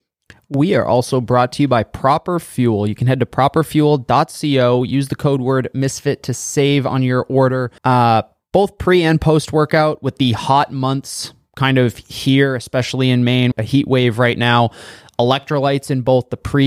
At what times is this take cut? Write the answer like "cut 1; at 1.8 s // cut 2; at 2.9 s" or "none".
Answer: cut 1; at 7.8 s // cut 2; at 13.5 s